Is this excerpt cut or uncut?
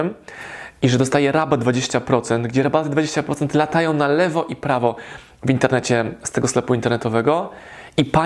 uncut